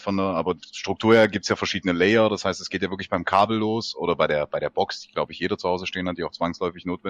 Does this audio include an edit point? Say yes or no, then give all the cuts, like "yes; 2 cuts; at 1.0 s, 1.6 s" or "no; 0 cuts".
no; 0 cuts